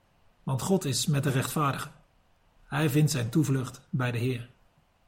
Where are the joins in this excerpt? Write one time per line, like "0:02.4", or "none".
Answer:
0:02.6